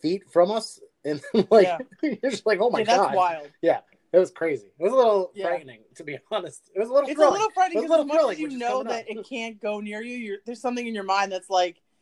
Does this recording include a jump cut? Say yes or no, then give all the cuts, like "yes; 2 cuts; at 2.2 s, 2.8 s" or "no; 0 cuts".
no; 0 cuts